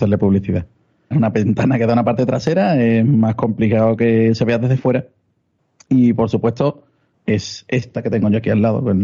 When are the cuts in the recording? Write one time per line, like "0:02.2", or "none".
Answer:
0:01.1
0:07.1